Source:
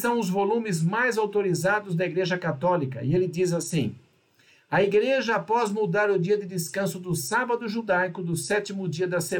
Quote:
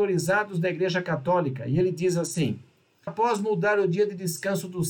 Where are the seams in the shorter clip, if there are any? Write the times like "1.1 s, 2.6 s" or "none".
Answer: 3.1 s

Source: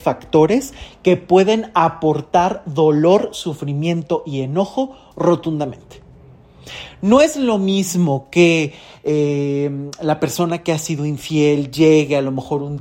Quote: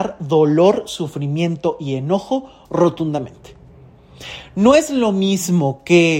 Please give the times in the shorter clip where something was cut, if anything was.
none

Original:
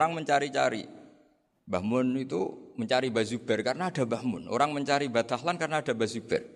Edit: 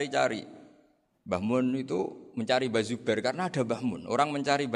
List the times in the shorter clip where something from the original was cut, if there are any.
none

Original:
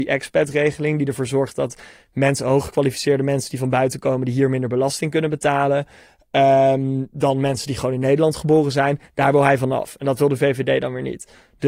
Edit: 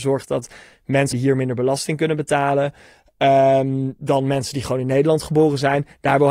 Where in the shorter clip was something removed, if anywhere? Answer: 1.1 s

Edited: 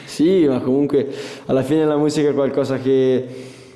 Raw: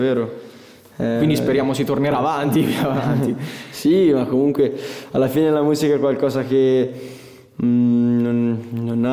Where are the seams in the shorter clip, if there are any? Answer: none

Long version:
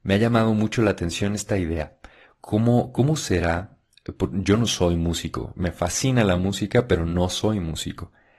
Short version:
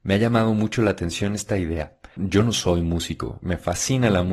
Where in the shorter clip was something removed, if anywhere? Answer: 2.2 s

